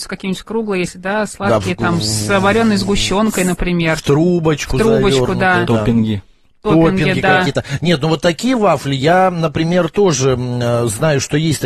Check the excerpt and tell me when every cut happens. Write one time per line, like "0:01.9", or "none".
none

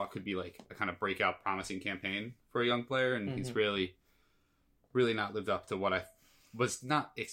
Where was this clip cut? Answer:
none

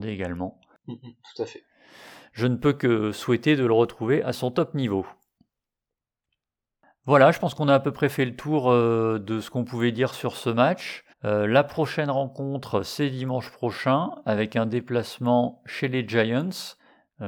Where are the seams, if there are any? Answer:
0:11.1

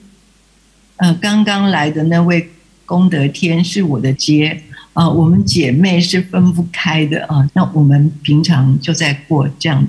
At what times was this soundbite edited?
0:04.2
0:07.5

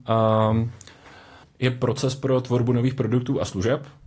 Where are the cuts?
0:01.4

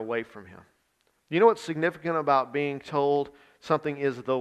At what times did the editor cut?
0:01.2

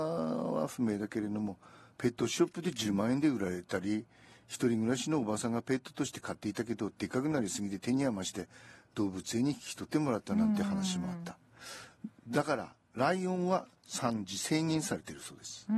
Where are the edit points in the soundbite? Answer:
none

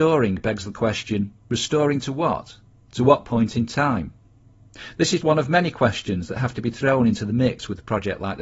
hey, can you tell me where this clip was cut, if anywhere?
0:05.2

